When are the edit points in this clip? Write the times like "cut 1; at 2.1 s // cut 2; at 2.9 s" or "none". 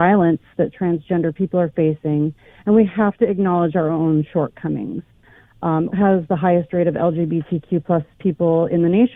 cut 1; at 5.9 s